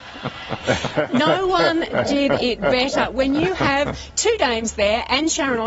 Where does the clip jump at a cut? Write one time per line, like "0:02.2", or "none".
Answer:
none